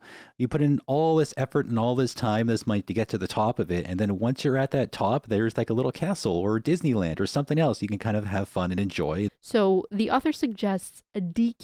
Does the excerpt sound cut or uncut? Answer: cut